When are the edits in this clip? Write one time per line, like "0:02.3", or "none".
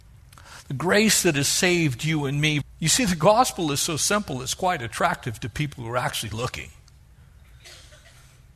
0:02.6